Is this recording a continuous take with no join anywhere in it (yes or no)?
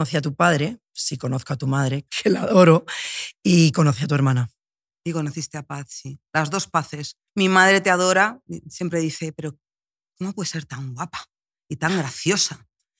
no